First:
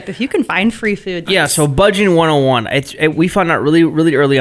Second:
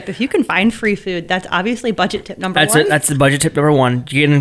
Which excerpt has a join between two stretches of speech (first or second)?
first